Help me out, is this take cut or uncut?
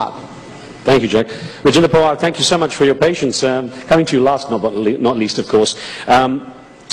uncut